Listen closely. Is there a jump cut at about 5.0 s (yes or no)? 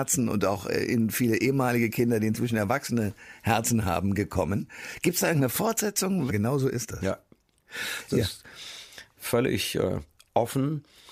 no